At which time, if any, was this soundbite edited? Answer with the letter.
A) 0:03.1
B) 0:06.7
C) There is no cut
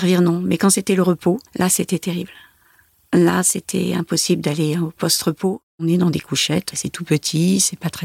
B